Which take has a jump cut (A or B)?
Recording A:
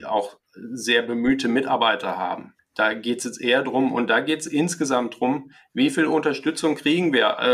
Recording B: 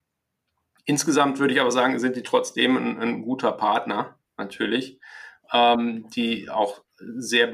A